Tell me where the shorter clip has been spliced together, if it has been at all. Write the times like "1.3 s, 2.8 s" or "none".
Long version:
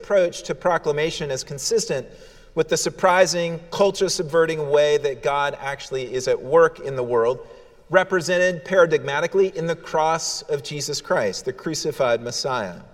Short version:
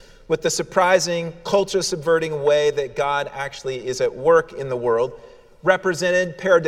none